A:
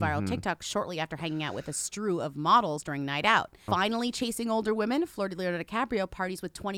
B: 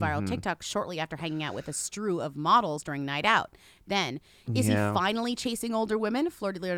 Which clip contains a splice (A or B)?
A